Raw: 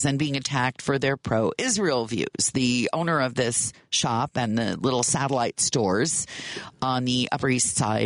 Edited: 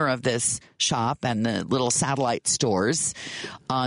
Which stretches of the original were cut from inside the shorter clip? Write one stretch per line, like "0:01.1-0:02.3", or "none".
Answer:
none